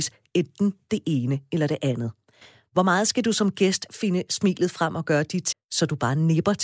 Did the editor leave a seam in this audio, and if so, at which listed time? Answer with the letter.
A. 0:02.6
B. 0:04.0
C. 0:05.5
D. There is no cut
C